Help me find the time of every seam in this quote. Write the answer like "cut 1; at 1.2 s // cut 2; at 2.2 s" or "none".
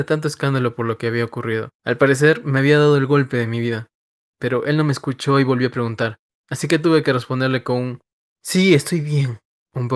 none